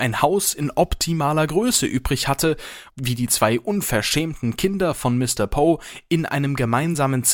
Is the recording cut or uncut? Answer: cut